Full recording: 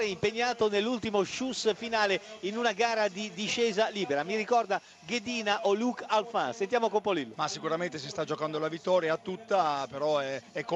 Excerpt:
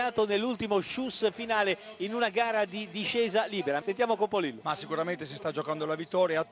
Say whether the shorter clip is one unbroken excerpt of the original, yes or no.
no